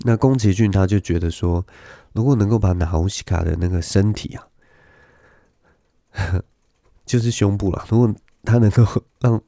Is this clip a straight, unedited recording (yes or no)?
yes